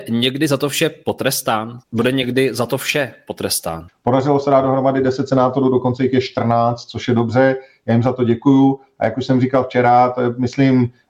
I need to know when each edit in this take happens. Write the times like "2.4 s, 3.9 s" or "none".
1.8 s, 3.9 s